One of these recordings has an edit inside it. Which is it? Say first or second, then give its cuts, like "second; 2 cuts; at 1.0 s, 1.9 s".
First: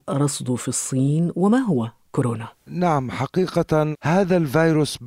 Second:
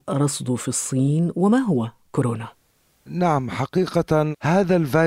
first; 1 cut; at 2.6 s